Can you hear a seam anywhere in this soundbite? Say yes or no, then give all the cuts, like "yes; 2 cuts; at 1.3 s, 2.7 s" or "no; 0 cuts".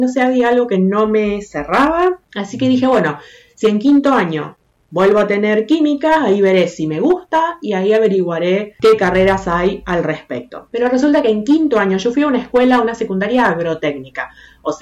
no; 0 cuts